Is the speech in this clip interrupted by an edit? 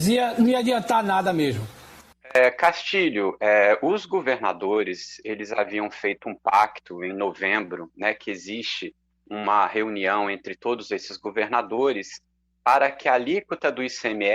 no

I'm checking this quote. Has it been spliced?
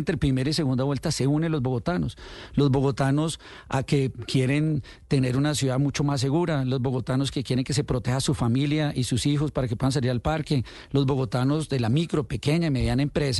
no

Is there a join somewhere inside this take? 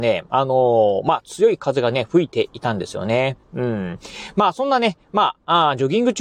no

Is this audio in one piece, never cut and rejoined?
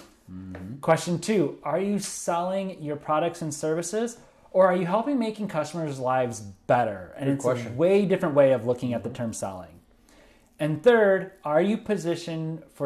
yes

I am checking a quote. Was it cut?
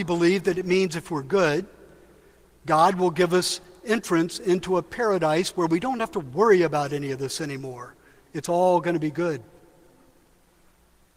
no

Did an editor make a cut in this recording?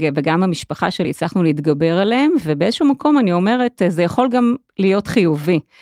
no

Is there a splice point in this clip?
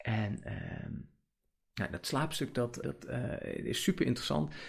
yes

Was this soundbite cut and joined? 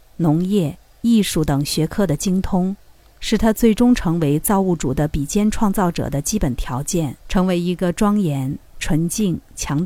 yes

